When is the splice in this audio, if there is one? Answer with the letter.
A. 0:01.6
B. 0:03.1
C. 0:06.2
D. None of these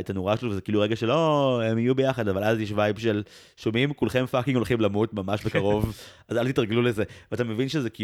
D